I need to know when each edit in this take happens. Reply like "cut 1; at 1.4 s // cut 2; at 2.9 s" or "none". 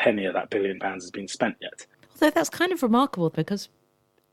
cut 1; at 1.9 s // cut 2; at 3.3 s